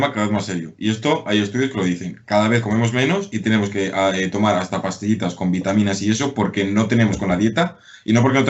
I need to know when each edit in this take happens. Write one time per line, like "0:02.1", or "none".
none